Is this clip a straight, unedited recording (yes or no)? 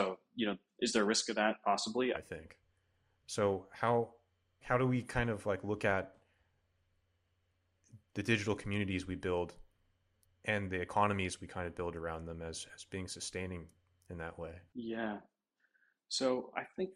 no